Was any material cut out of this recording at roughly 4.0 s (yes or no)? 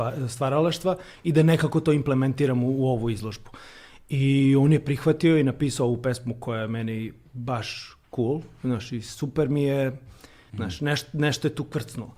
no